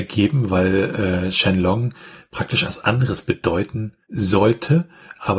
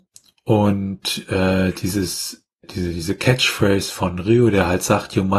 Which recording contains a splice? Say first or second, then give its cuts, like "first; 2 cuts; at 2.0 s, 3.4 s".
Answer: first; 2 cuts; at 2.6 s, 4.0 s